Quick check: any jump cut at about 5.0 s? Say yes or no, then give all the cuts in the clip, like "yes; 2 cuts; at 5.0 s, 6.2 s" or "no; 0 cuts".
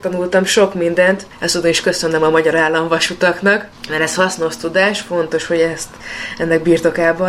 no; 1 cut; at 1.3 s